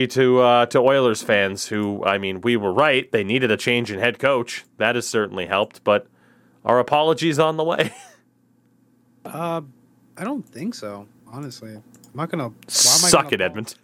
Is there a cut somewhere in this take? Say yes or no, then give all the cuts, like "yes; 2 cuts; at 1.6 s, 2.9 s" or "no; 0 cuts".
no; 0 cuts